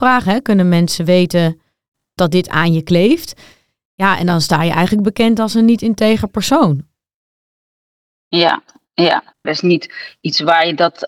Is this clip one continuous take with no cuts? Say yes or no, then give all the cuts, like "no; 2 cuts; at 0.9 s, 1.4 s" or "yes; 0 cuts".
no; 1 cut; at 9.4 s